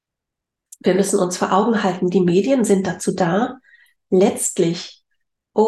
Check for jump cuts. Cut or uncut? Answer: uncut